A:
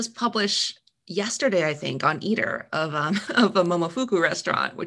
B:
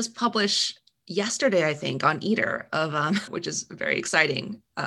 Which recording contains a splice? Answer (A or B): B